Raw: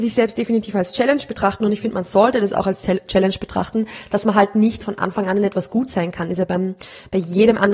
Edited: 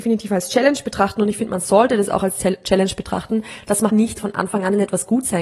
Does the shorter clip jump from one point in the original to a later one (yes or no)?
yes